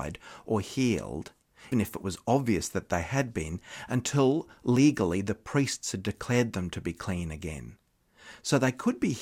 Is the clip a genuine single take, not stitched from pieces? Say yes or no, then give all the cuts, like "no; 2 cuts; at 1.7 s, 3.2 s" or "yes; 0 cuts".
no; 1 cut; at 1.7 s